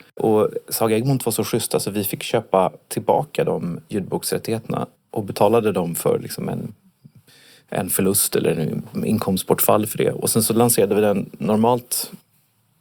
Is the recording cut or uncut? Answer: uncut